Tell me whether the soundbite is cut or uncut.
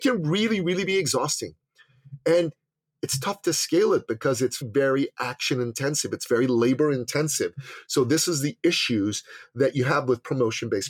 cut